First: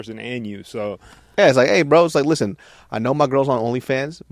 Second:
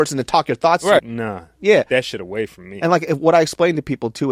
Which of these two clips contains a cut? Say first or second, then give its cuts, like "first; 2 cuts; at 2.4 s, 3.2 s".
second; 1 cut; at 1.0 s